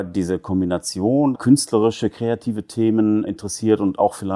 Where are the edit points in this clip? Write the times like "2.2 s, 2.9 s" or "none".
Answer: 1.3 s, 3.3 s